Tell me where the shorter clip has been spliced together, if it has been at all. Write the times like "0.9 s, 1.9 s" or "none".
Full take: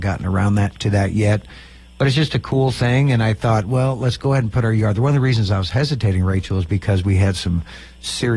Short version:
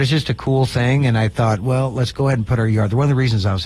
none